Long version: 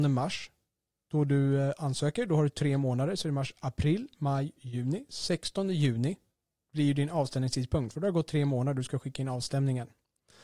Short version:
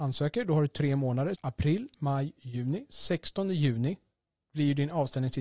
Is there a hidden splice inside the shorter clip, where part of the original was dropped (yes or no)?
yes